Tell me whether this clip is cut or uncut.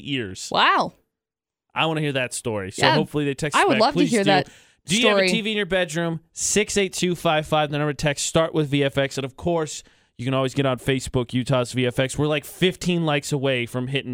uncut